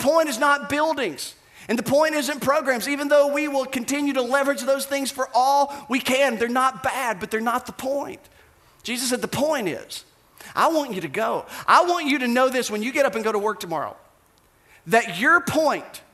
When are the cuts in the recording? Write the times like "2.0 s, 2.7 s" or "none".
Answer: none